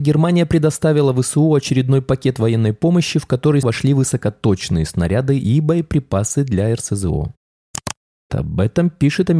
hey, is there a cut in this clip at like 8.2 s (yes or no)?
yes